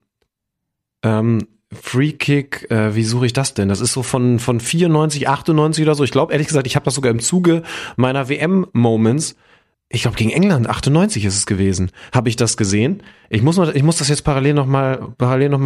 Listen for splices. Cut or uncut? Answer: uncut